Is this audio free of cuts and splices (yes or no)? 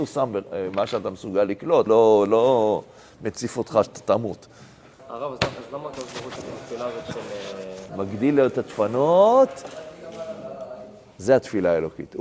no